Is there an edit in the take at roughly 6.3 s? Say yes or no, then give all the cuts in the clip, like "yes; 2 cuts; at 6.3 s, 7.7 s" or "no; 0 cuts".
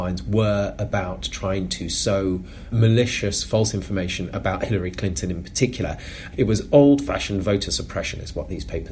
yes; 1 cut; at 6.3 s